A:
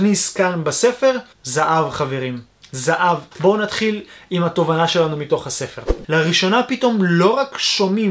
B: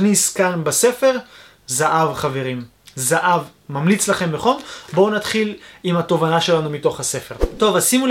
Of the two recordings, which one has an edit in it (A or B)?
A